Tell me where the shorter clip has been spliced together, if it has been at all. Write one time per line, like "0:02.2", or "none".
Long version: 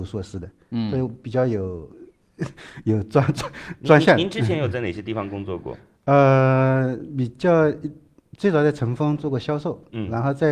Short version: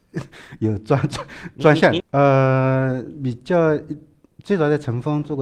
0:02.0